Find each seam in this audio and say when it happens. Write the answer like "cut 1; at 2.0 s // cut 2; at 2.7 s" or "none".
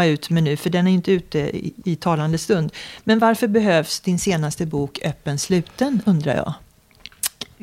cut 1; at 1.8 s

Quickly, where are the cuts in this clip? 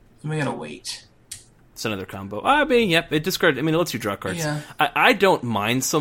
none

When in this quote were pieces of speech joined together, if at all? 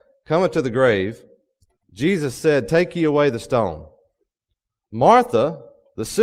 cut 1; at 1.8 s

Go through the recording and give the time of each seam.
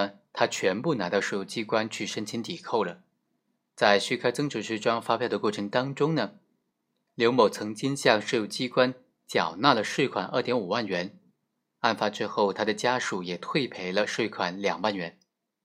none

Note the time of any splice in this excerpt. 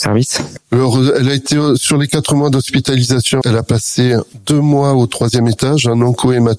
cut 1; at 3.4 s

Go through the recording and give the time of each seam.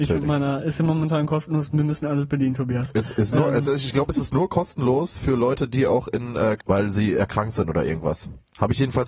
cut 1; at 6.6 s

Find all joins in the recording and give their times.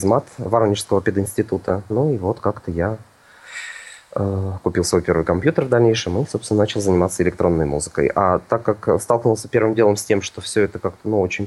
cut 1; at 1.9 s

